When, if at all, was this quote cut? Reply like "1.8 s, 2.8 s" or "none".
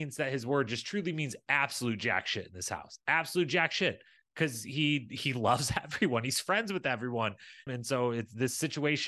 7.7 s